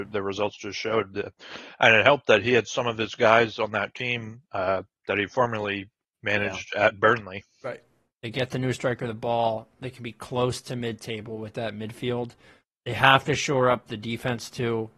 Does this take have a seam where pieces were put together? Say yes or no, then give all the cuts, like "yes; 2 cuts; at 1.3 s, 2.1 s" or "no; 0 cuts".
yes; 1 cut; at 8.1 s